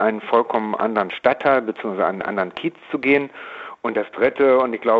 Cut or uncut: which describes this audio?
uncut